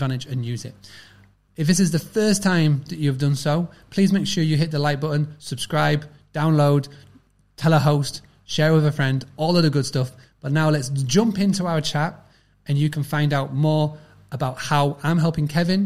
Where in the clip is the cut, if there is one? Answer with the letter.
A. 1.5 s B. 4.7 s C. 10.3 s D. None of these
A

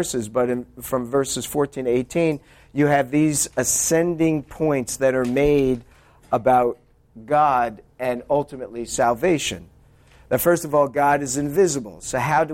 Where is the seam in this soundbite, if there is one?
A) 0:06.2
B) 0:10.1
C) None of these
C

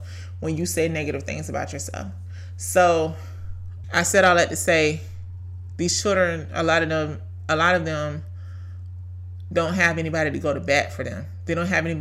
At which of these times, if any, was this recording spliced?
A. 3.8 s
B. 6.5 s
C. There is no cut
A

